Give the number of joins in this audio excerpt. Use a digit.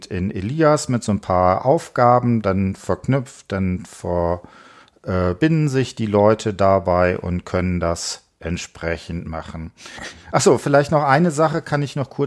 0